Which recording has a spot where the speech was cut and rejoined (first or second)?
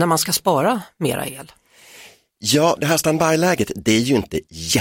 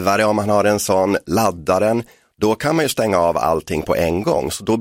first